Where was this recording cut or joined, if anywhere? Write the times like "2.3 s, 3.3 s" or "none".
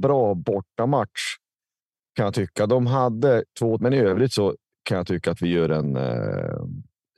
3.8 s